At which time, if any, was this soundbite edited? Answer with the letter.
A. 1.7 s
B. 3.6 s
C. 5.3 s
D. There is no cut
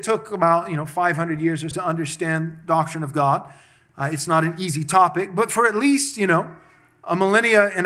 A